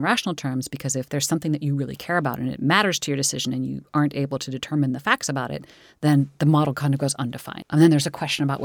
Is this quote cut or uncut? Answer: cut